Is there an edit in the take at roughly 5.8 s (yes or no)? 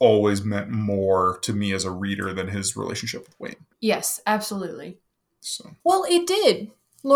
yes